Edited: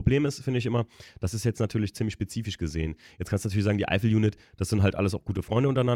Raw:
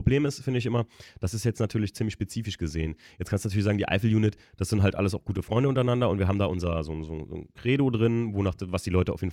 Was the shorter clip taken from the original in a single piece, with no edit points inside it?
yes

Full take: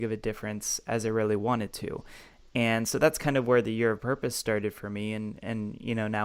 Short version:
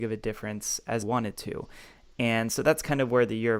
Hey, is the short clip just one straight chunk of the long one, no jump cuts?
no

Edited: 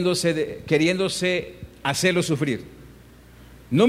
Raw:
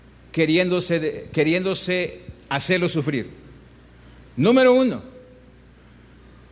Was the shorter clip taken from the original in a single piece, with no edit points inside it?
yes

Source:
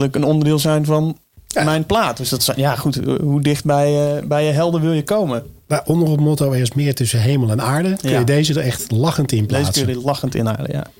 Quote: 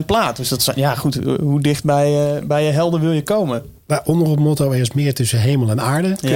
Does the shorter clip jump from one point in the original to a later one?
no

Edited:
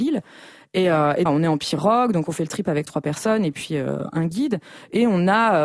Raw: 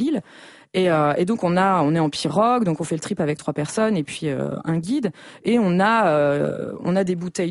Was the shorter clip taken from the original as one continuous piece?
no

